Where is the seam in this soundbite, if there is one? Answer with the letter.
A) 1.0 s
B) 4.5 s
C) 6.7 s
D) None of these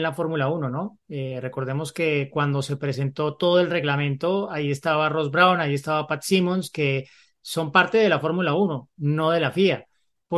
D